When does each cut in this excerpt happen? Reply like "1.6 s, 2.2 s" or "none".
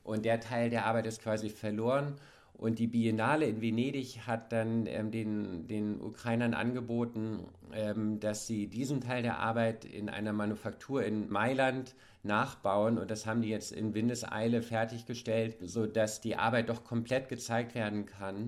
none